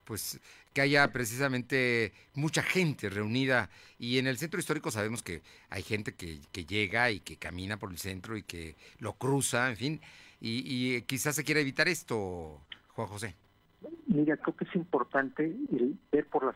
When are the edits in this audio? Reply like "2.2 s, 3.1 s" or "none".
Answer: 15.7 s